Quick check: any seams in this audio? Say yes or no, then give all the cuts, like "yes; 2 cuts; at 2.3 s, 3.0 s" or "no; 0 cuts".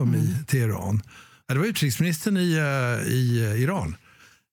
yes; 1 cut; at 1.4 s